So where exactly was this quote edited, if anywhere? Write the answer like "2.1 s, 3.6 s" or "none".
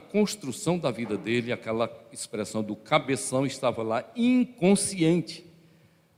none